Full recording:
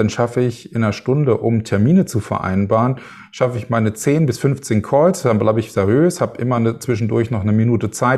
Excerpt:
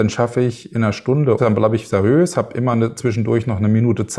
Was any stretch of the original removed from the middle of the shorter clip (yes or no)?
yes